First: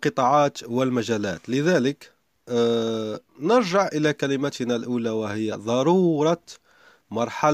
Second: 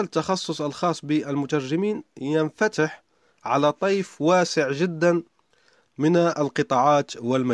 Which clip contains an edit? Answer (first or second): first